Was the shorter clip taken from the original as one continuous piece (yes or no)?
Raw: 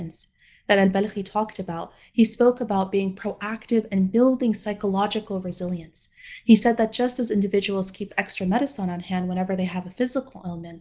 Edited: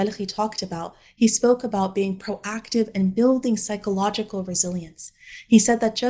yes